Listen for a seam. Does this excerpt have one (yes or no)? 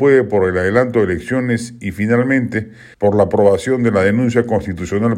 yes